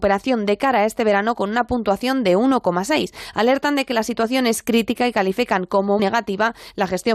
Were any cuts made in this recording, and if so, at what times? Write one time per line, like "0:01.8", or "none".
0:06.0